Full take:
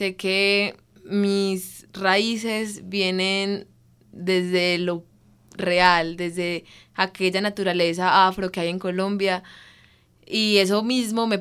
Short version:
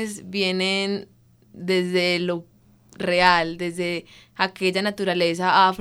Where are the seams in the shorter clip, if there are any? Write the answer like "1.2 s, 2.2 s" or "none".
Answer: none